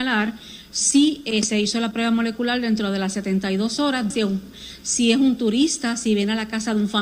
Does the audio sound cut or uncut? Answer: cut